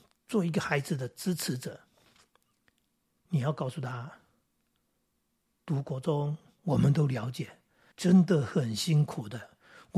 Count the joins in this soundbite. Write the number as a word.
two